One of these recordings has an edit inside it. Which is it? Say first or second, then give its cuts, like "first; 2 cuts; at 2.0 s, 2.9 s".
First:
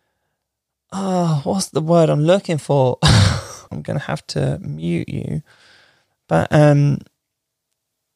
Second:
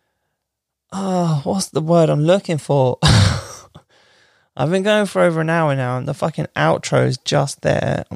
first; 1 cut; at 3.7 s